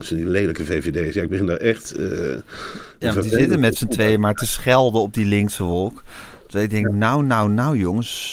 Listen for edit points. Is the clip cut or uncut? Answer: uncut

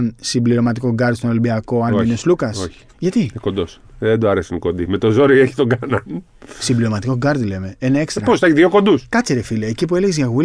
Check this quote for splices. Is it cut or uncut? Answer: uncut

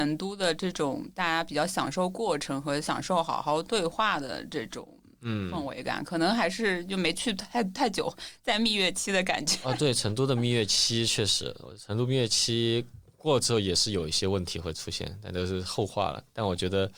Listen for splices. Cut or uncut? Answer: uncut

